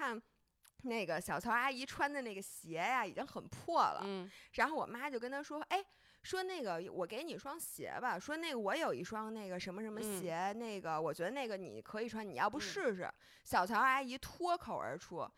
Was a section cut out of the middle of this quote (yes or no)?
no